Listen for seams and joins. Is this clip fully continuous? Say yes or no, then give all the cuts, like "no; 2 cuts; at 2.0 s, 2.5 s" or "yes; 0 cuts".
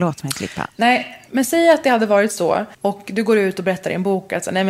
no; 1 cut; at 2.7 s